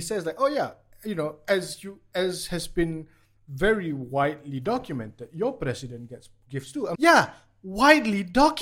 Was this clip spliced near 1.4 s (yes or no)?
no